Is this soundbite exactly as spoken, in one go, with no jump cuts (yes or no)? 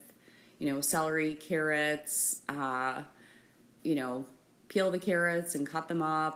no